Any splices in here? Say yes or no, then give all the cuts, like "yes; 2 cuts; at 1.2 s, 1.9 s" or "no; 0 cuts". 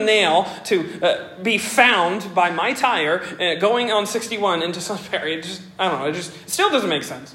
no; 0 cuts